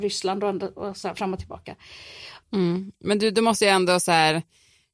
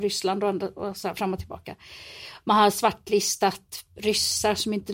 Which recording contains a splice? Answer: first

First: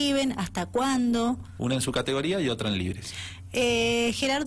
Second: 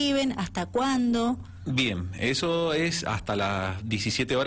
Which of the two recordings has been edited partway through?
first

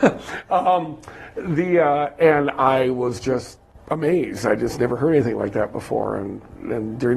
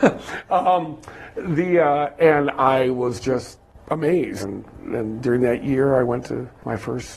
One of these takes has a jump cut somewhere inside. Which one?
second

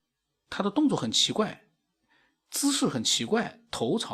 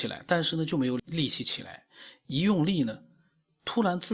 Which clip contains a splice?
second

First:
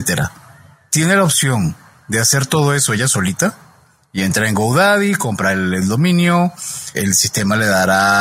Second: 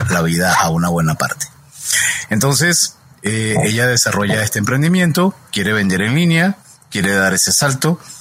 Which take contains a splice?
first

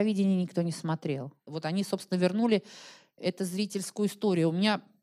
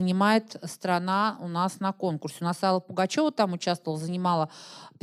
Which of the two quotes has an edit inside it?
first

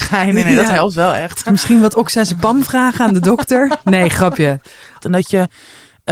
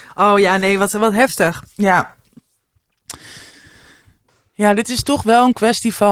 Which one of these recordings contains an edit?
first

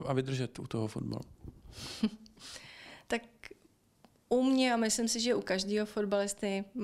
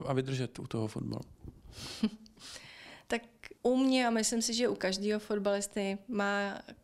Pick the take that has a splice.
second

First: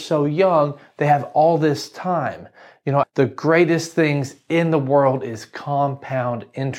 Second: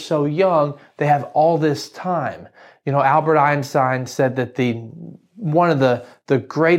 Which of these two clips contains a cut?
first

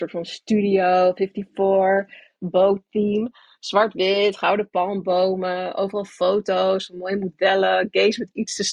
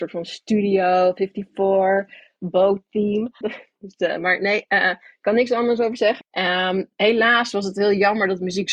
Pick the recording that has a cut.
second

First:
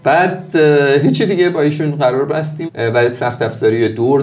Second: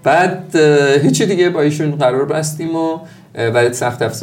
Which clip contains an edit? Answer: first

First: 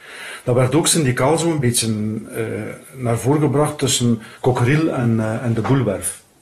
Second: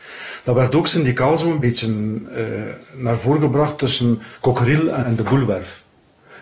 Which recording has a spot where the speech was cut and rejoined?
second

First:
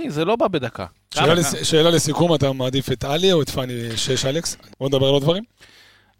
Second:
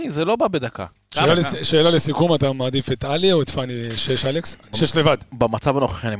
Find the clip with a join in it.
first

